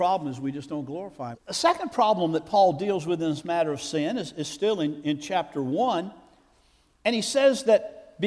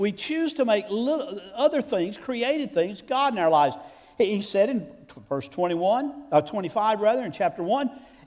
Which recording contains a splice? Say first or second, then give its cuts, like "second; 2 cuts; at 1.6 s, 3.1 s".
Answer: first; 1 cut; at 1.3 s